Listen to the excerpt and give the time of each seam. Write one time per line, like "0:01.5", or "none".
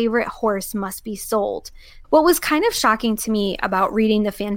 0:02.0